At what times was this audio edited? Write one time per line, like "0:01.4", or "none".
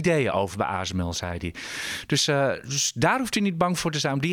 none